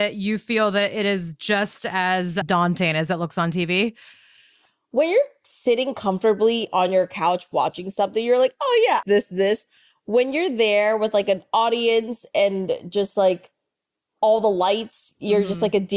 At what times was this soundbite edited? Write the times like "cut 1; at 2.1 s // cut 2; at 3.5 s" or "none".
cut 1; at 9.0 s